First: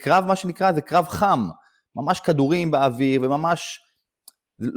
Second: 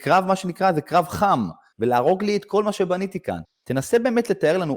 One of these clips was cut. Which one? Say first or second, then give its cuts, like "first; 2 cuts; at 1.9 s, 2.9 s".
second; 2 cuts; at 1.7 s, 3.4 s